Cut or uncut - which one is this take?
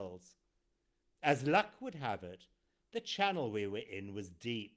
cut